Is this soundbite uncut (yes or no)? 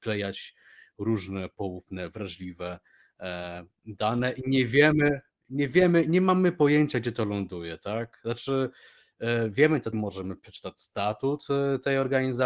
no